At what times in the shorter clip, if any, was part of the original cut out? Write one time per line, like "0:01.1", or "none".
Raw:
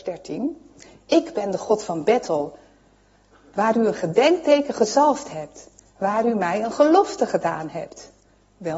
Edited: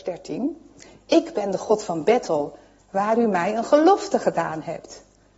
0:02.8